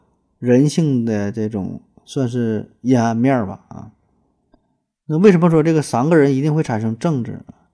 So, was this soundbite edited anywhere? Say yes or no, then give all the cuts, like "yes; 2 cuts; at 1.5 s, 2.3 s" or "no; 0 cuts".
no; 0 cuts